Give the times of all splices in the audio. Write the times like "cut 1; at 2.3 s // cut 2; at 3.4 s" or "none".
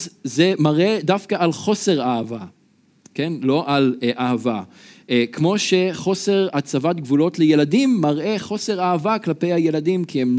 none